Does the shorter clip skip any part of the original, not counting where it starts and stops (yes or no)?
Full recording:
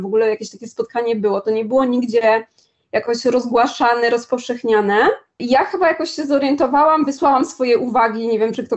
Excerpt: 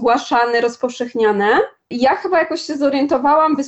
no